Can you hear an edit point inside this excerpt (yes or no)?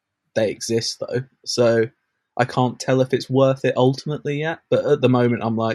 no